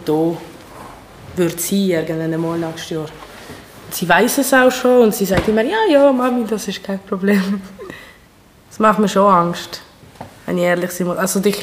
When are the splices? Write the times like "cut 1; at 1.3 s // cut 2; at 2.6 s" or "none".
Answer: none